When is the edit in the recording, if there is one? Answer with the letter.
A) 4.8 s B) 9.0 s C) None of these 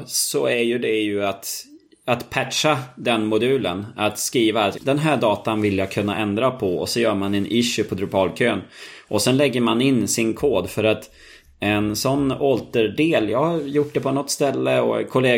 A